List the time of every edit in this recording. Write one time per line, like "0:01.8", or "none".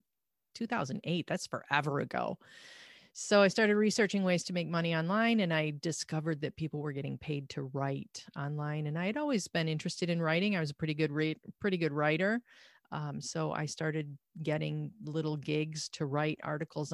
none